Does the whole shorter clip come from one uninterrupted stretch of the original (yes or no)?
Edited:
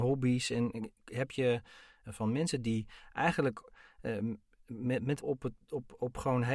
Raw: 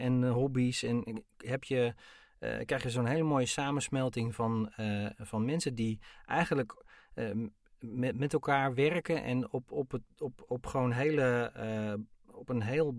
no